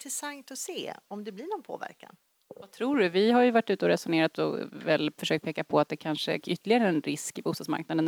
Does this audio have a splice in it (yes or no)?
yes